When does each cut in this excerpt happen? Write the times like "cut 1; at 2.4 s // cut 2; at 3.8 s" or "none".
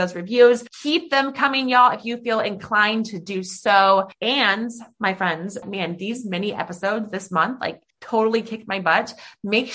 cut 1; at 5.6 s // cut 2; at 7.9 s